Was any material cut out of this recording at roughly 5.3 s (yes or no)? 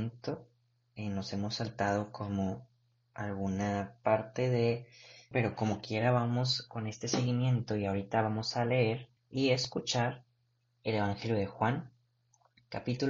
yes